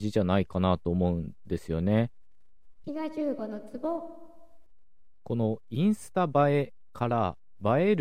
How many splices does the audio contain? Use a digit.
1